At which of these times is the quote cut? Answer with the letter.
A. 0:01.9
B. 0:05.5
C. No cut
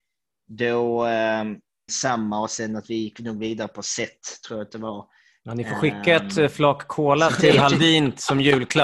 A